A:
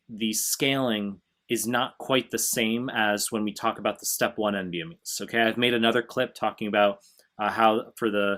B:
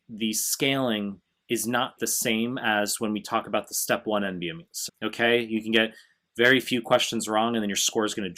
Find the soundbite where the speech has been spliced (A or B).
B